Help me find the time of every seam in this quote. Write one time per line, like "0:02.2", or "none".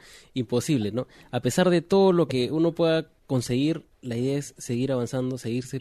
none